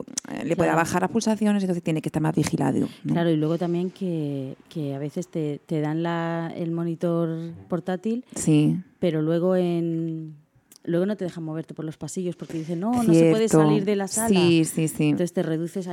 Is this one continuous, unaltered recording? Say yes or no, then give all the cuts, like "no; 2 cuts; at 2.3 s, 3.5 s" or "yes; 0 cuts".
yes; 0 cuts